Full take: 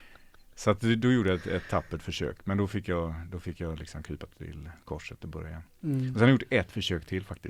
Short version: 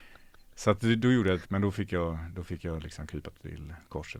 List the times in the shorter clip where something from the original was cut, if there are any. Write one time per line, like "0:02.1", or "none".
0:01.4